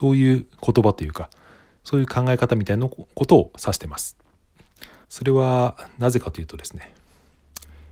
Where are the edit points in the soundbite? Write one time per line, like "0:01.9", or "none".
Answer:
0:05.0